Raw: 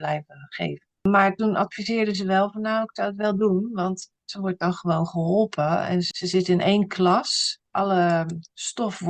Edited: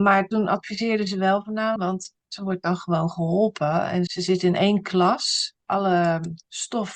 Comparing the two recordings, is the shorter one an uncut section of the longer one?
no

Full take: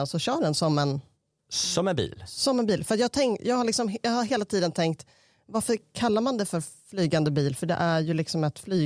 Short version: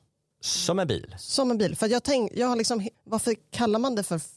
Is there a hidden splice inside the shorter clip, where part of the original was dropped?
yes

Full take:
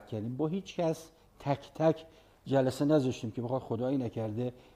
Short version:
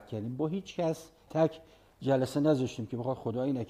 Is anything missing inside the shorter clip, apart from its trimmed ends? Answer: yes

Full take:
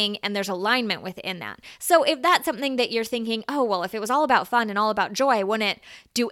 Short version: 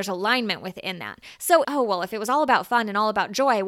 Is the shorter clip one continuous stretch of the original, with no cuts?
no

